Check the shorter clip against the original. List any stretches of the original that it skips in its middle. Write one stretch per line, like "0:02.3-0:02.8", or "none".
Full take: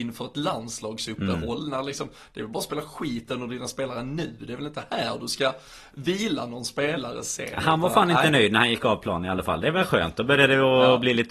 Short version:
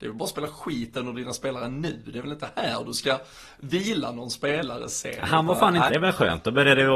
0:08.2-0:09.6